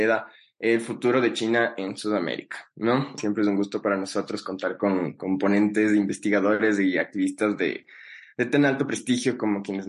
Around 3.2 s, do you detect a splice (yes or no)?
yes